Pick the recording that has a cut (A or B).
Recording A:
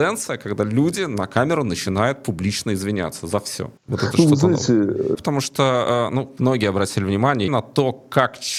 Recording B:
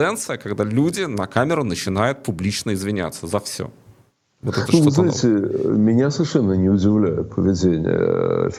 A